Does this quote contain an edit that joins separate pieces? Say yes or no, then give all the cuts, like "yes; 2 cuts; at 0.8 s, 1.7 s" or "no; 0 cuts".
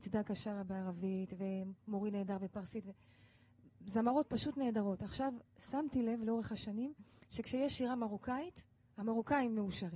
no; 0 cuts